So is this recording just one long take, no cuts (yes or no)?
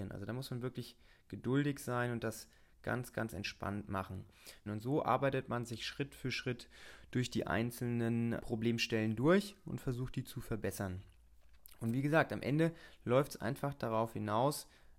no